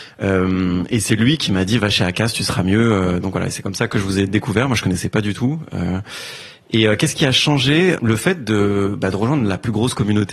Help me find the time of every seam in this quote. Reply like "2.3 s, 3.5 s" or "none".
8.0 s